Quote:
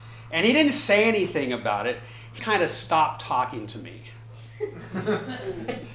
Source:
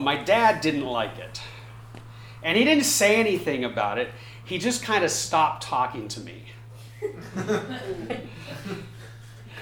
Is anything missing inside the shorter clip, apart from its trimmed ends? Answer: yes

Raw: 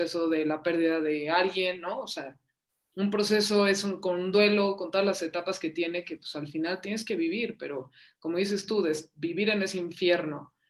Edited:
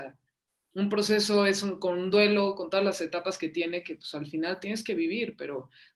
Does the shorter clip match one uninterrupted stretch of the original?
yes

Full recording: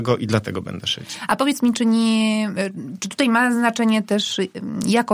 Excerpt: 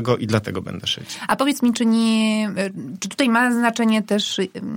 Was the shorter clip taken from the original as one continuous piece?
yes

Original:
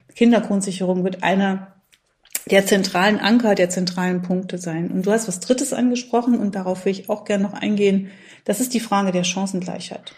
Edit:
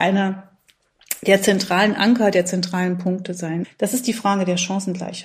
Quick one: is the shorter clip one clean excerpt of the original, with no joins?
no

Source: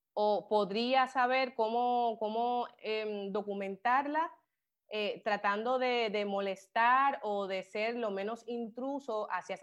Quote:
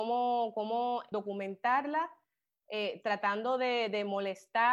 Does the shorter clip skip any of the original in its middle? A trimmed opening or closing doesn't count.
yes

